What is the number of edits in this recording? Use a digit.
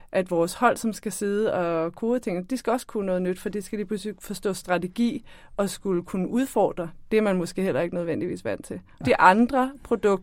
1